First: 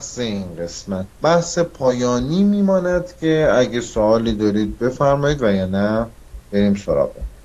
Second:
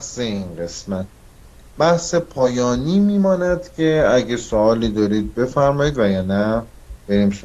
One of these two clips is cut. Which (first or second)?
first